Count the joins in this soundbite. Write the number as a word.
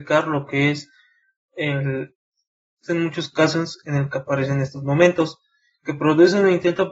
one